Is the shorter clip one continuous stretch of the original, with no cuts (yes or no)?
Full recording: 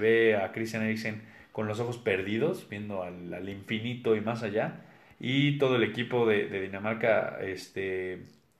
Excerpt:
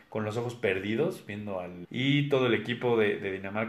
no